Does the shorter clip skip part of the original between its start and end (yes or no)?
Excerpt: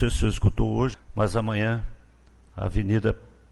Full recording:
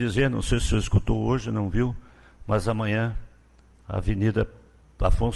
yes